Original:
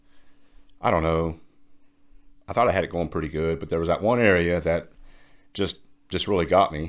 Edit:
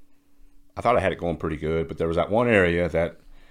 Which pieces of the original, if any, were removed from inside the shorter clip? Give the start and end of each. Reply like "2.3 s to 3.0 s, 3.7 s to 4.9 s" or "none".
none